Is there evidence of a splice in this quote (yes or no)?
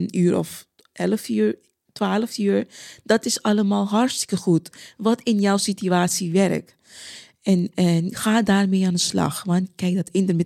no